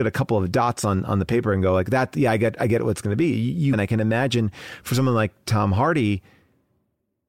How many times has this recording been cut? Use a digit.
1